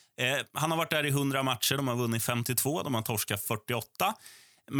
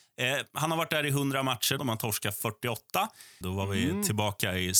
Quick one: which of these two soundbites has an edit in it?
second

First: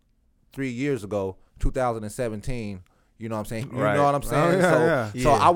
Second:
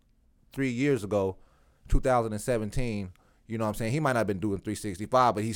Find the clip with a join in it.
first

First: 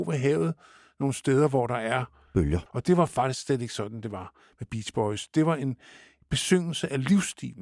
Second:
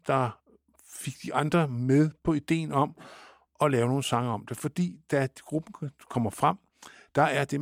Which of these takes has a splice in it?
first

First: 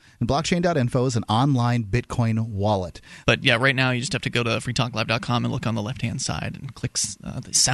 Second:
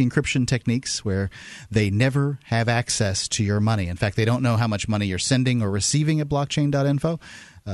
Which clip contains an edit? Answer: first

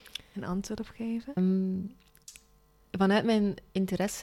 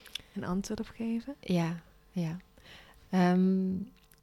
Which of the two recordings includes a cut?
first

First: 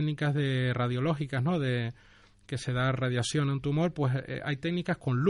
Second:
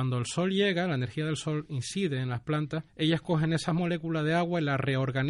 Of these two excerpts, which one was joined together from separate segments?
second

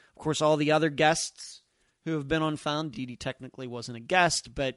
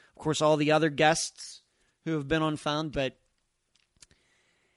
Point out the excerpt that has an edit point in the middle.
second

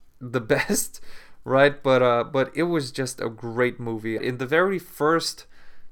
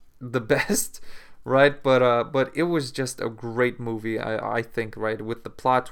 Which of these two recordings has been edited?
first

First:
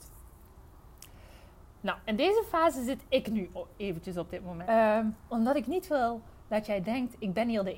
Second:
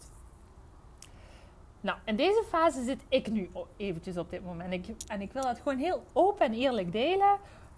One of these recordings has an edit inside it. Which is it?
first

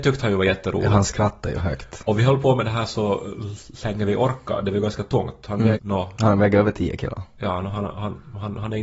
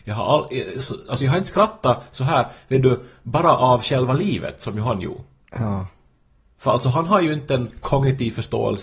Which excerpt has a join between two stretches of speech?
first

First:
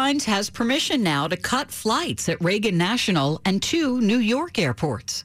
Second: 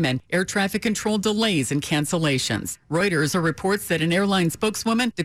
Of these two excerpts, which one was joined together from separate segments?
second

